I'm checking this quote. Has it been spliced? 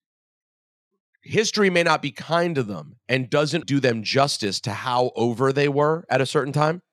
yes; 1 cut; at 3.6 s

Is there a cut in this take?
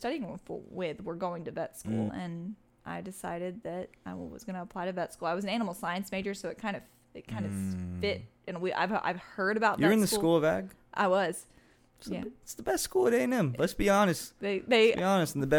yes; 1 cut; at 2.1 s

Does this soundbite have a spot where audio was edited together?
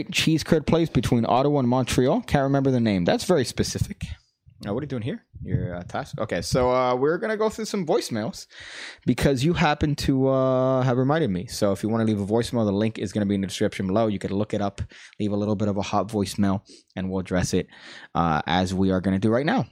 no; 0 cuts

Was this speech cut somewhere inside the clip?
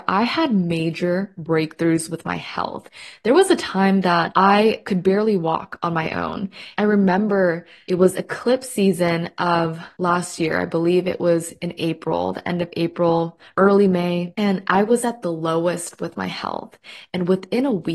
no; 0 cuts

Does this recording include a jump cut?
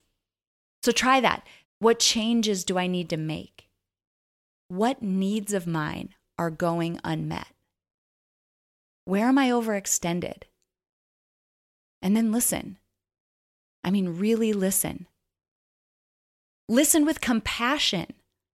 yes; 1 cut; at 1.6 s

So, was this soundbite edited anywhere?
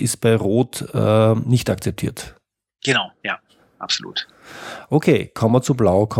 no; 0 cuts

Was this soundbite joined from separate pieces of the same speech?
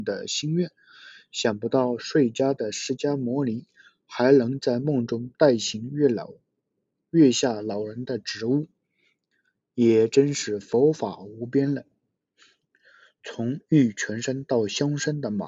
no; 0 cuts

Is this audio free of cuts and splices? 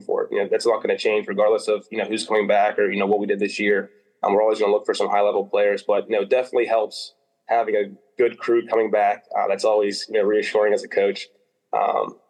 yes; 0 cuts

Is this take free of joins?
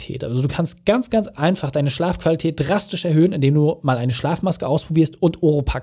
yes; 0 cuts

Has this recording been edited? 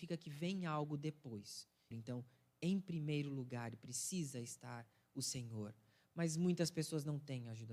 yes; 1 cut; at 1.9 s

